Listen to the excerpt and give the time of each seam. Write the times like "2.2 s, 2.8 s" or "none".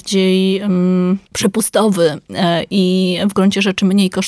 1.3 s

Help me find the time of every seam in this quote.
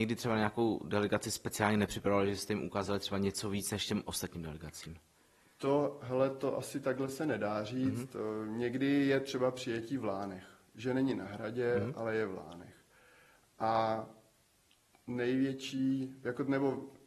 none

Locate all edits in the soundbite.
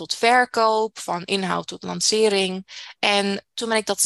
3.0 s

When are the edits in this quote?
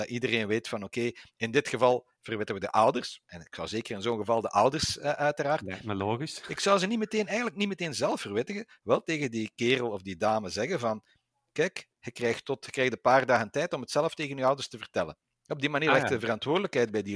none

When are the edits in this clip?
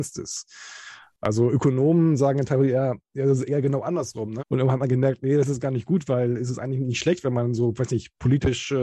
4.4 s

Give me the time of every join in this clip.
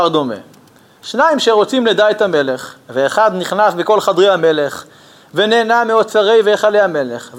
none

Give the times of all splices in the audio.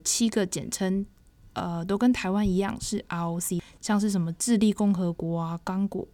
none

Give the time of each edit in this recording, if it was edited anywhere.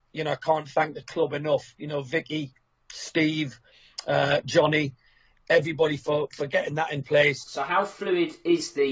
7.4 s

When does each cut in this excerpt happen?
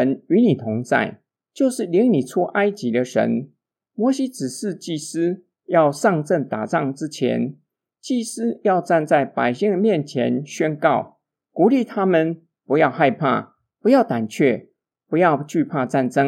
none

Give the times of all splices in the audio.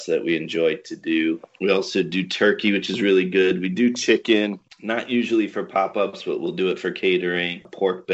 none

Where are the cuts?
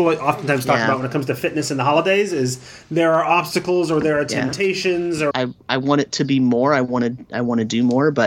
5.3 s

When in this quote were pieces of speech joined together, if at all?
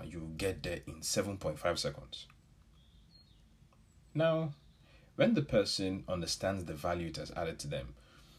none

